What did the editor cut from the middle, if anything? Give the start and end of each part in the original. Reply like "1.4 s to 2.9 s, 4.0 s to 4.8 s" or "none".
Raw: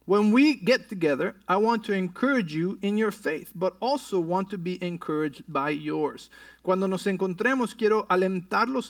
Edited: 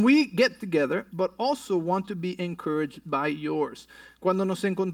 1.4 s to 3.5 s